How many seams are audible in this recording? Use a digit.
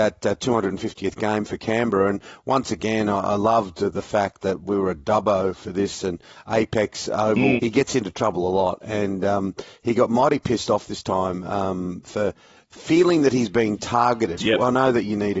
2